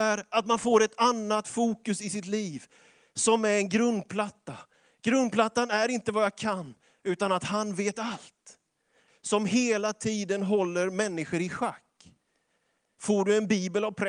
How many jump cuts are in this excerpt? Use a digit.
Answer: 1